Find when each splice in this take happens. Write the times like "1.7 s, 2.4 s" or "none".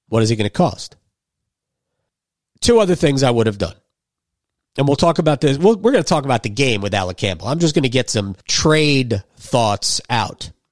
8.4 s